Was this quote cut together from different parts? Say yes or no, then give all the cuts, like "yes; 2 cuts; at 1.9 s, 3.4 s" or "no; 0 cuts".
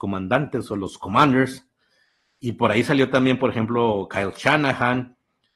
no; 0 cuts